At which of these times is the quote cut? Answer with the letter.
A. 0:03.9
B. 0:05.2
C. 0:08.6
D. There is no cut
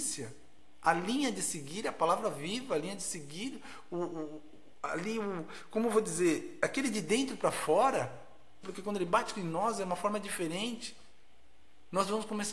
C